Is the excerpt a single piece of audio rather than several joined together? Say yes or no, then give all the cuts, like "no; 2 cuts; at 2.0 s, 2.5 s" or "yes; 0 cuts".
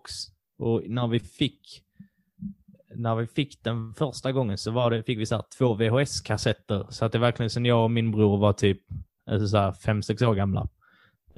yes; 0 cuts